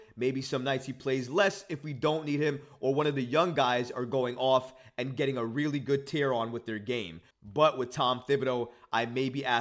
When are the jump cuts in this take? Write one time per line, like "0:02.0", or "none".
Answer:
0:07.3